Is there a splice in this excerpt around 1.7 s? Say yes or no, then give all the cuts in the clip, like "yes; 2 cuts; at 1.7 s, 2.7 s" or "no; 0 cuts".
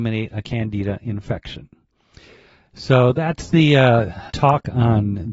no; 1 cut; at 4.3 s